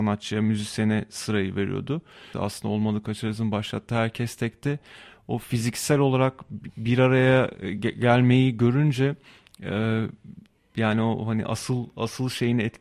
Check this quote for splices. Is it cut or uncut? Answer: cut